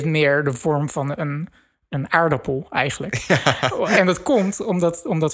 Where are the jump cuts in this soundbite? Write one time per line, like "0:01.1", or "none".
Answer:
none